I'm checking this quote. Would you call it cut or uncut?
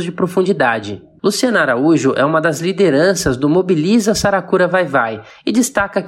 cut